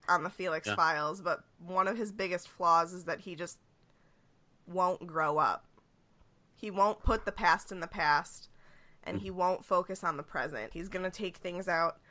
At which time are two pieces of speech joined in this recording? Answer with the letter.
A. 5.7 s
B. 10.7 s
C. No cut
B